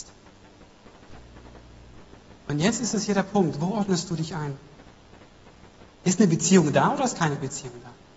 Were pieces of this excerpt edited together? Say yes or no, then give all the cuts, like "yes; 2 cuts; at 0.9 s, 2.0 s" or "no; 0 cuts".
yes; 1 cut; at 5.9 s